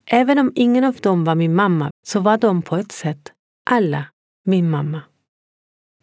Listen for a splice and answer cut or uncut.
cut